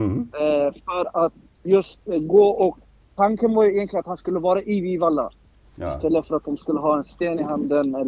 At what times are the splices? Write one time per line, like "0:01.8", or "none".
0:05.6